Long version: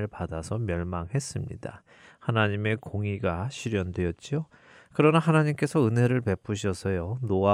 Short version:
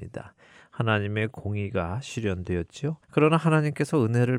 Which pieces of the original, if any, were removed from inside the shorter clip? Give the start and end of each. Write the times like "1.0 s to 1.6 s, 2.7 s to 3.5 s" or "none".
4.5 s to 4.9 s